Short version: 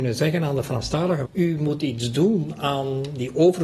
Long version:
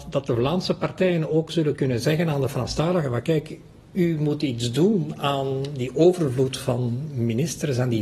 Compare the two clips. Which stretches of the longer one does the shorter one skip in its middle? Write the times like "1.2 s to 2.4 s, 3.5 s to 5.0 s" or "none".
3.1 s to 3.8 s